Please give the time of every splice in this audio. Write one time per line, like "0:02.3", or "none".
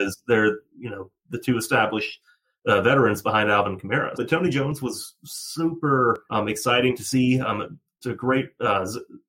0:04.2
0:08.0